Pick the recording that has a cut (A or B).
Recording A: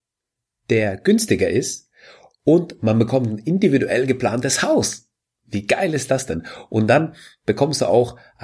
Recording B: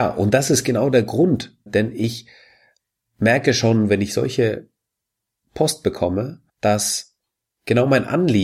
B